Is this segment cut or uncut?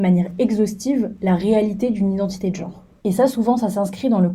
cut